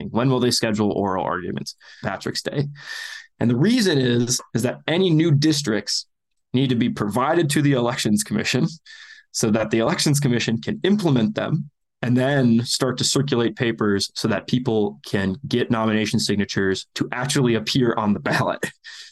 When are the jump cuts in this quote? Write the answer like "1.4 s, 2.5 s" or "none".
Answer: 2.0 s